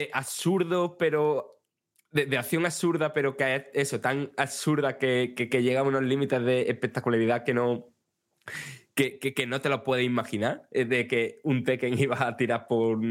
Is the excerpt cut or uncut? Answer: uncut